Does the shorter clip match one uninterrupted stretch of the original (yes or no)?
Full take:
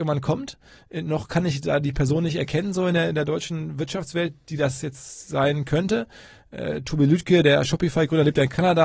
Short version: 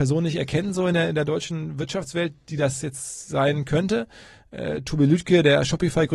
yes